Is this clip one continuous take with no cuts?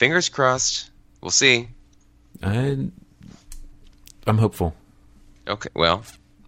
yes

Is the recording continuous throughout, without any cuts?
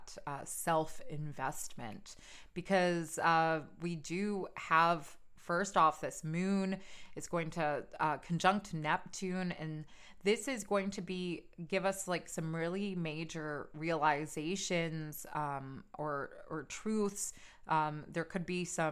yes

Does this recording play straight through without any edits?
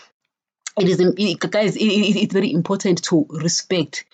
no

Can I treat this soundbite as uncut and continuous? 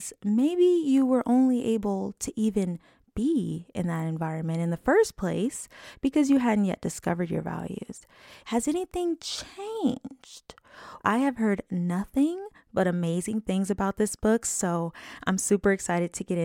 no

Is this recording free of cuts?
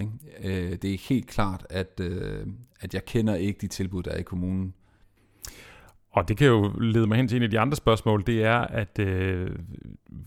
yes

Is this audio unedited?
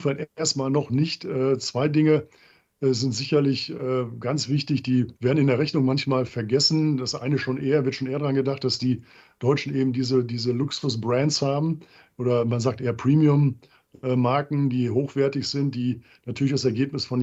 no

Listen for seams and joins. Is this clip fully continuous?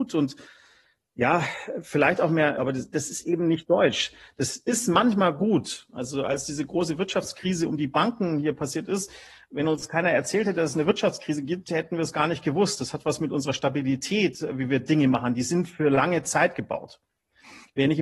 no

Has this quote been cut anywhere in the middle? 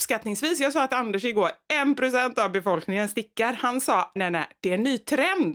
yes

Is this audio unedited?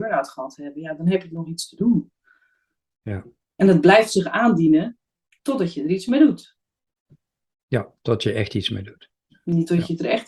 yes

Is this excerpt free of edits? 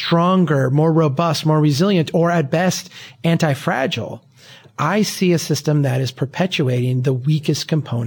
yes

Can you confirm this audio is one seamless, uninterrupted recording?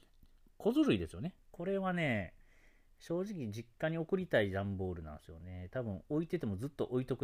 no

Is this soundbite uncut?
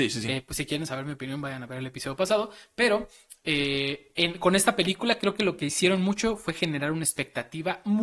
yes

